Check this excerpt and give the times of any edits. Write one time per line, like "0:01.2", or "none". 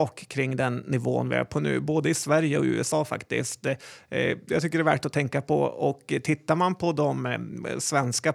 none

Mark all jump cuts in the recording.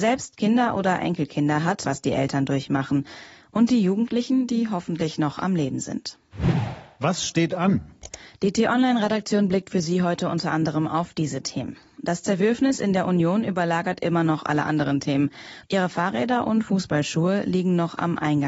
0:01.8
0:15.6

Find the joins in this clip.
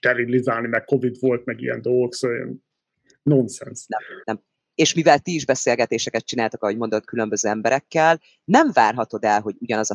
0:04.2

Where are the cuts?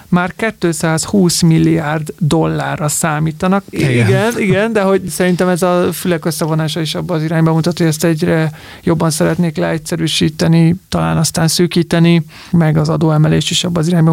0:03.7

